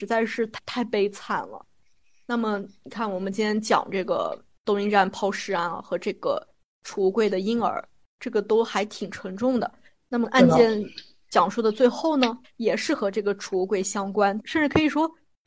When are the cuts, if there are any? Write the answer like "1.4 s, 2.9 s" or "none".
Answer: 12.4 s, 14.4 s